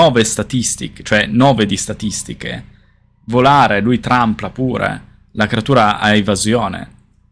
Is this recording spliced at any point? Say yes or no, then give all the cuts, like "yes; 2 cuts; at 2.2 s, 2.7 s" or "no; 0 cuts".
no; 0 cuts